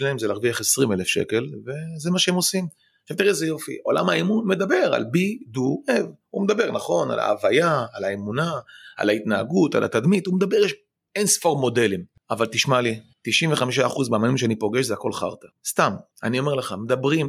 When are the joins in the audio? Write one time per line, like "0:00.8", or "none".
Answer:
0:16.1